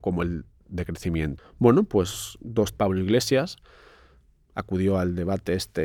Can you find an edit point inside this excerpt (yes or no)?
yes